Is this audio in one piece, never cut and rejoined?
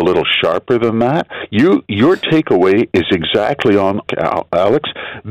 no; 1 cut; at 4.1 s

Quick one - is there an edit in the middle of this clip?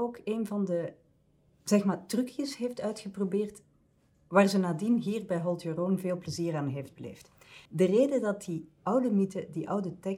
yes; 1 cut; at 7.7 s

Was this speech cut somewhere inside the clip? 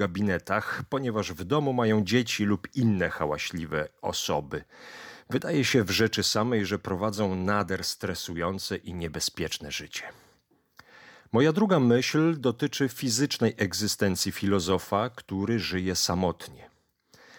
no; 0 cuts

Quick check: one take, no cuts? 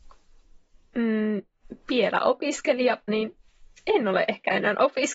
no; 1 cut; at 3.1 s

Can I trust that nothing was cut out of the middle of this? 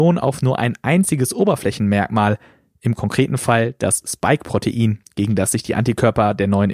yes; 0 cuts

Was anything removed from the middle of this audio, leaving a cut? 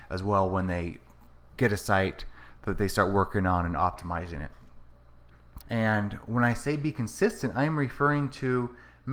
yes; 2 cuts; at 1.6 s, 5.6 s

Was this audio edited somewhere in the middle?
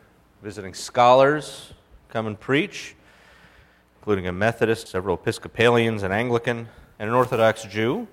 yes; 2 cuts; at 4.9 s, 7.0 s

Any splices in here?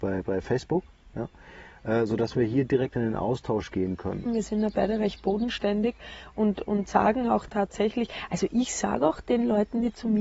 yes; 1 cut; at 4.3 s

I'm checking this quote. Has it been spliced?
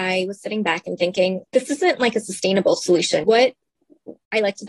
yes; 2 cuts; at 1.5 s, 3.2 s

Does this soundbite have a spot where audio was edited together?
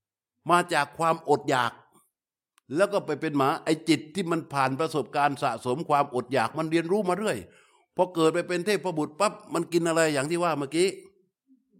no; 0 cuts

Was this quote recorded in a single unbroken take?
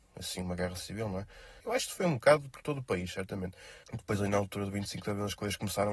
no; 2 cuts; at 1.6 s, 3.8 s

